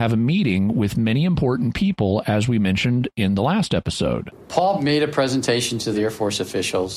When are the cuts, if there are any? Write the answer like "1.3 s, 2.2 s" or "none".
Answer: none